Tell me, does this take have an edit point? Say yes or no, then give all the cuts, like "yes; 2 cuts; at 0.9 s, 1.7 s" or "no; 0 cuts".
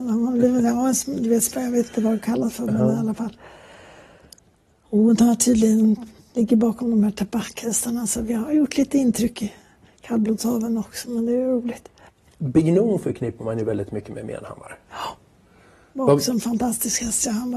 no; 0 cuts